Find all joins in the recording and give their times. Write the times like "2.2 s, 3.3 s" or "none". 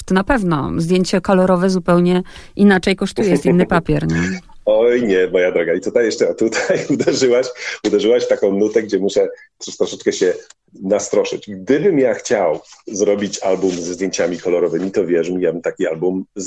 none